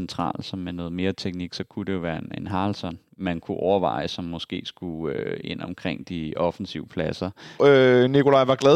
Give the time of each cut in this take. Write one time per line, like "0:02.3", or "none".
0:07.6